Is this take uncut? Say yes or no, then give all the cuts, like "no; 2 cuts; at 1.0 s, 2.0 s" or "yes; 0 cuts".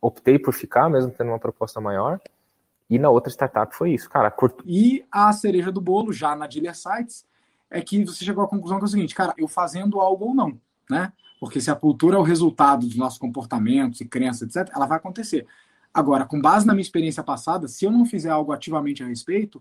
no; 2 cuts; at 4.6 s, 9.3 s